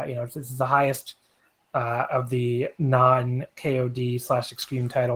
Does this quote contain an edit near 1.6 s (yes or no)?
no